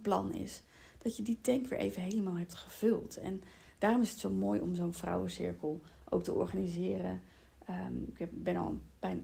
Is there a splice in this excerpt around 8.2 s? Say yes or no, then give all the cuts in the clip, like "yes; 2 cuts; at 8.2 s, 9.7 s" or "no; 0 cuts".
no; 0 cuts